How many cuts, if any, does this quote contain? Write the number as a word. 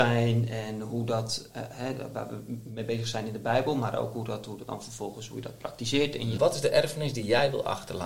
two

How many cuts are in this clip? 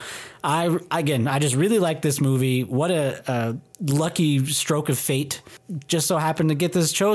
zero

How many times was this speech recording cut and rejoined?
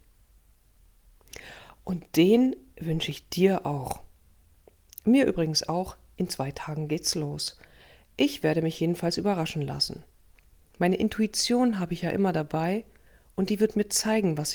zero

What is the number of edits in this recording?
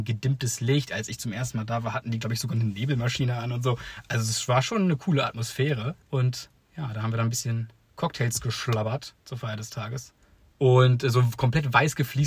two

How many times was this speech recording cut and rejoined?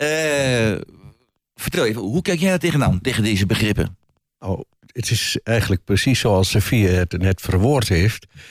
zero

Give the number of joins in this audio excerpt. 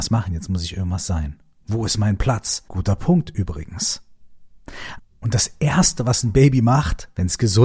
two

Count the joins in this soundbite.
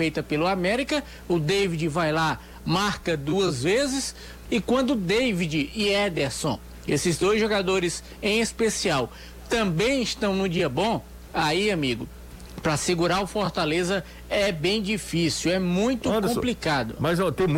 one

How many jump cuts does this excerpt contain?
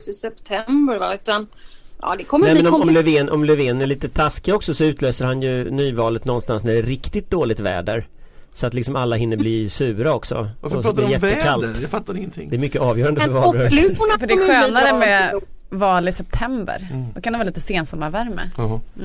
zero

